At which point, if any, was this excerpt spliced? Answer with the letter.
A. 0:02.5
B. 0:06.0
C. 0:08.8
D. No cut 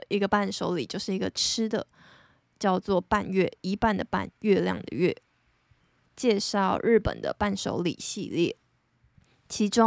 B